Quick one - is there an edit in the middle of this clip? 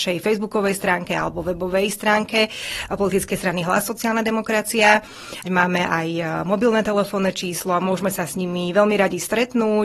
yes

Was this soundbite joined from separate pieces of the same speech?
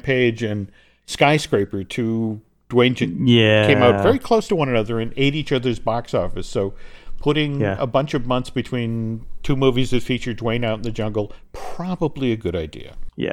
no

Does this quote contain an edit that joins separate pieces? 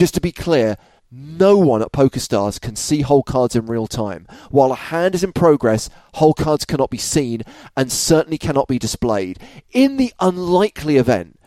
yes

